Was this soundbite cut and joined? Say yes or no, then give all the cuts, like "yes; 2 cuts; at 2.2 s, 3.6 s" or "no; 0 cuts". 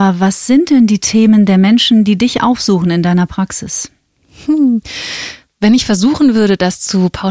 no; 0 cuts